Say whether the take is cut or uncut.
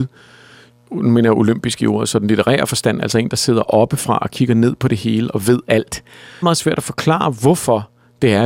cut